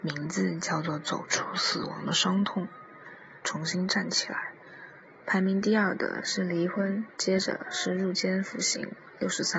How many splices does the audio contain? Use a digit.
3